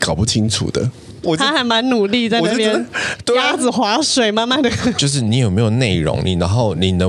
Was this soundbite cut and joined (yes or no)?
yes